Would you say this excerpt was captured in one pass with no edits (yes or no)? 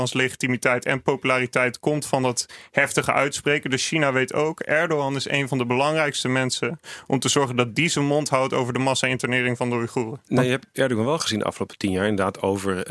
yes